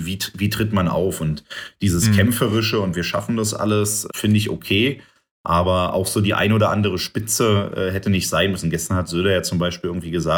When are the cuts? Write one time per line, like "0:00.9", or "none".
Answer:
0:04.1